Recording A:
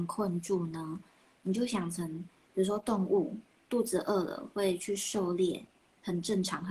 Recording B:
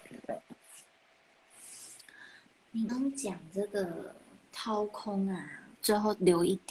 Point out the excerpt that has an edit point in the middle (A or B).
B